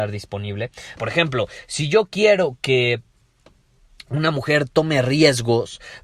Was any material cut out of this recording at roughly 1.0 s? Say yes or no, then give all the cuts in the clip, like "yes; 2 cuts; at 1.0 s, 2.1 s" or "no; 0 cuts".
yes; 1 cut; at 1.0 s